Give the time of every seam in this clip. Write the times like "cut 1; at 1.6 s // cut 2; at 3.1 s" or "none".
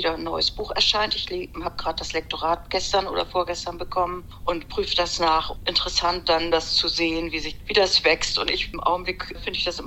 none